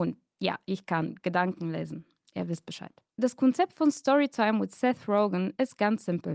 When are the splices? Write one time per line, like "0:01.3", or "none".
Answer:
0:03.1